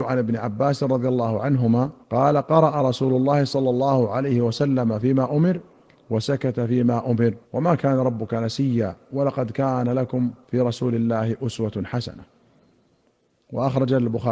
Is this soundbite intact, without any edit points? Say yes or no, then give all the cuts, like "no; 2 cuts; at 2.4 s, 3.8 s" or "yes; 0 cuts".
no; 3 cuts; at 2.0 s, 7.4 s, 10.4 s